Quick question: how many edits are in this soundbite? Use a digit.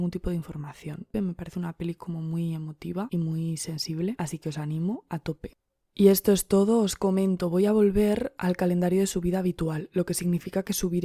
1